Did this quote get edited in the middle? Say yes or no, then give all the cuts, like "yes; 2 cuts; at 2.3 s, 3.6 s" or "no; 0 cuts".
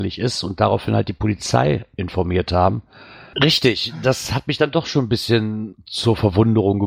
yes; 2 cuts; at 3.3 s, 5.7 s